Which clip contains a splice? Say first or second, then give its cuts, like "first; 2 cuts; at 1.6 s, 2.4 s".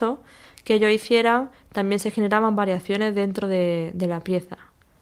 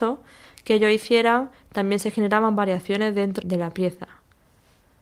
second; 1 cut; at 3.4 s